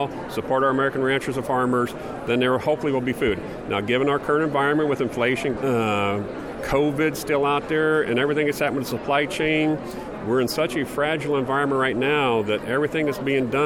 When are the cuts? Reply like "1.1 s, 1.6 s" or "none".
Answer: 5.6 s